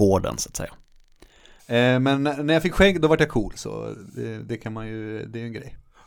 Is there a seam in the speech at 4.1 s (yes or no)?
no